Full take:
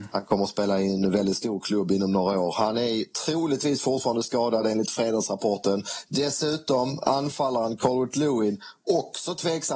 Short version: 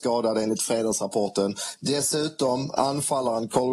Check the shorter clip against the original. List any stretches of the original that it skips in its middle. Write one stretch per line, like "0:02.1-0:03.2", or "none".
none